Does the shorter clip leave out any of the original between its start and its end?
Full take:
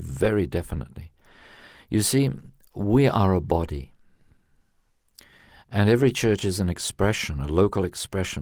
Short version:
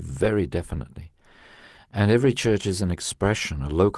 yes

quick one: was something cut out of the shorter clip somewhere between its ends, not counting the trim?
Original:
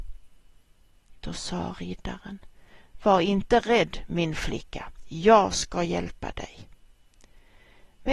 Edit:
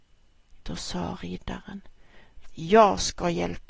yes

